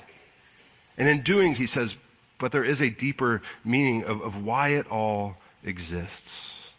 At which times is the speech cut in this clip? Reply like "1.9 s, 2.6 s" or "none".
1.5 s